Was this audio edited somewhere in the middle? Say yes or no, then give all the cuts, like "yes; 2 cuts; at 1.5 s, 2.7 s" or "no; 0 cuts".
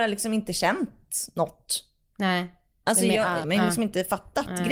yes; 1 cut; at 3.4 s